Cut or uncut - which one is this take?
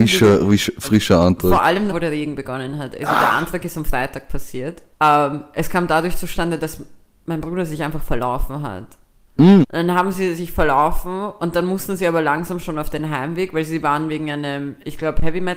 cut